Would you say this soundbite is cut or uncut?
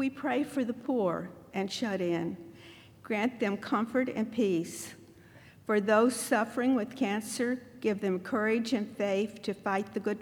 cut